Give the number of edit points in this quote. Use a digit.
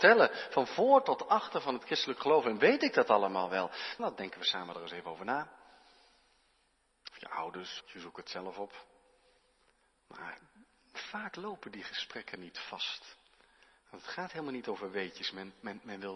2